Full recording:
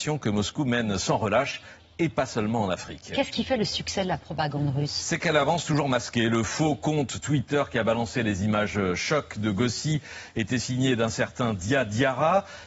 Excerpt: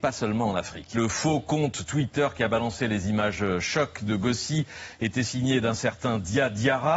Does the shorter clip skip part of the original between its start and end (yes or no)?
yes